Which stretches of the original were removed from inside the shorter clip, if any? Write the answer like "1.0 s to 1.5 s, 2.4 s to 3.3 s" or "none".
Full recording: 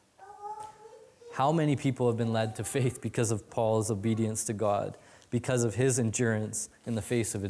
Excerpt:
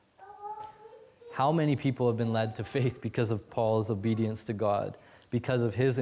none